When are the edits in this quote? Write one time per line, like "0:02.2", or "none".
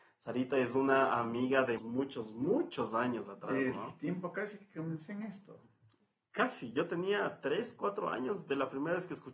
0:01.8

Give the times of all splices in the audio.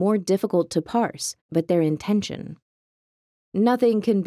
0:01.5

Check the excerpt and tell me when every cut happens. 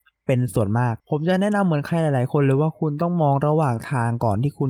0:01.0

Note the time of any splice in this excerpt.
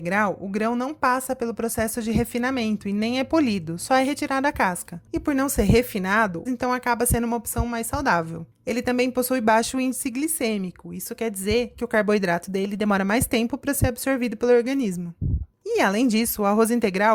0:06.5

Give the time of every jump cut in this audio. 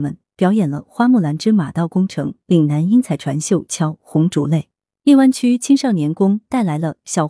0:04.9

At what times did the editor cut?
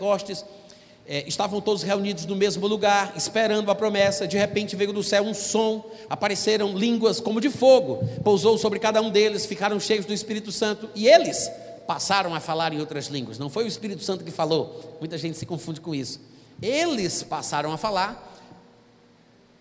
0:06.1

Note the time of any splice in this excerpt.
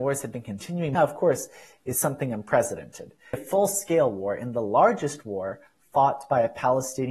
0:01.0
0:03.3

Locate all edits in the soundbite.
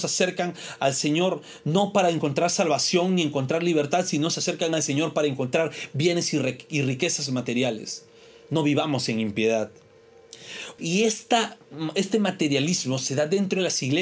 0:10.8

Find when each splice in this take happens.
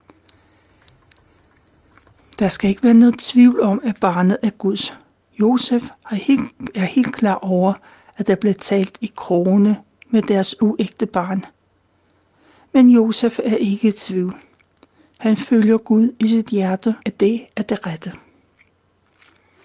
0:17.0

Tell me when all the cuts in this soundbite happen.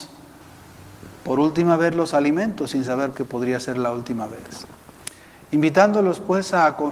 0:03.1

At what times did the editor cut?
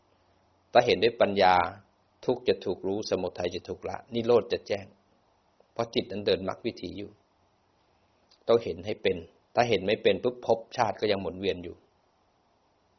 none

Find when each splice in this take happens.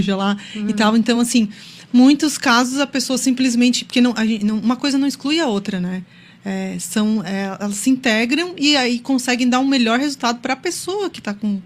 none

